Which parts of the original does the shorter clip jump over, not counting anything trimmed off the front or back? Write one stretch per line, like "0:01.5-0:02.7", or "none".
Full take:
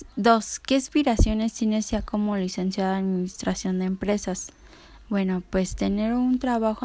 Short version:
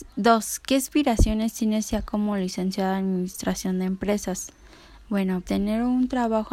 0:05.5-0:05.8